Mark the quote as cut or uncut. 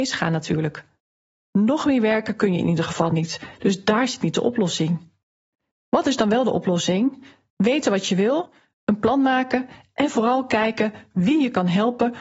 uncut